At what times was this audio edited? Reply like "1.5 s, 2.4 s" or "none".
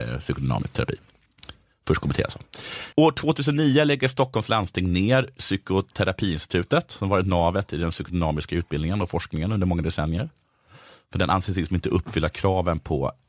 2.9 s